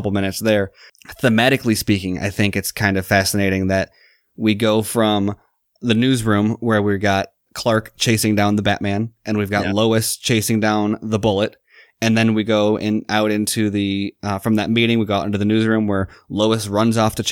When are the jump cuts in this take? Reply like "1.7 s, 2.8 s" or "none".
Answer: none